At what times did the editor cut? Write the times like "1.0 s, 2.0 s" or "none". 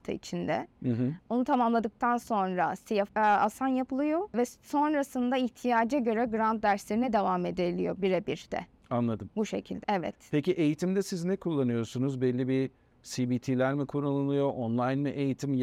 3.1 s, 9.8 s